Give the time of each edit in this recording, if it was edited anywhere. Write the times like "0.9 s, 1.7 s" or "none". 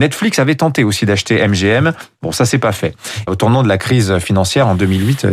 3.3 s